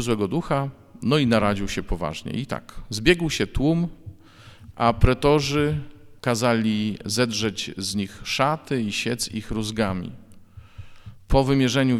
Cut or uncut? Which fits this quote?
cut